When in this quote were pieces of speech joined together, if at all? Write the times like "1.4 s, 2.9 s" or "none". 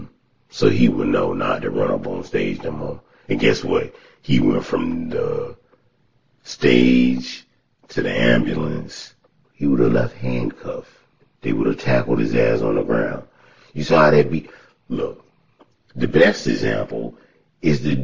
9.4 s